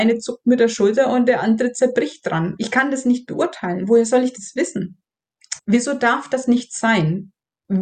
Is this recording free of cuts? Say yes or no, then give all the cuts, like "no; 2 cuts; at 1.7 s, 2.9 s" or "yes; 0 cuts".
no; 2 cuts; at 2.6 s, 5.6 s